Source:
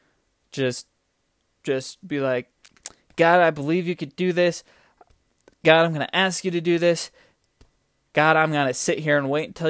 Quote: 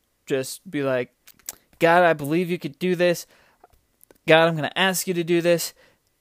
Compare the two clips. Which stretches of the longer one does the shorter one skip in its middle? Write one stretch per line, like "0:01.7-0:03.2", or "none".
none